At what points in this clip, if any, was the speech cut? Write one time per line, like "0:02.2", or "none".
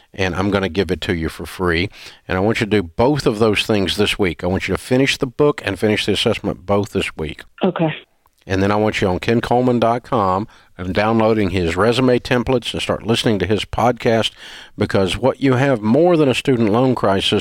0:07.5